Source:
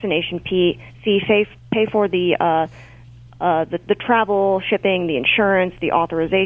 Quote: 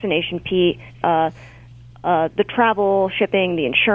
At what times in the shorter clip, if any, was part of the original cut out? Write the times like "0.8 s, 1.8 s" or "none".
1.0 s, 2.3 s